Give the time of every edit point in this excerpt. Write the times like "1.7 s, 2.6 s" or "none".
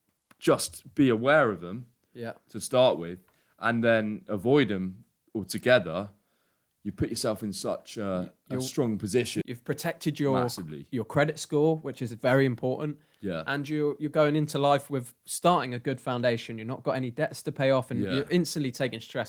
9.4 s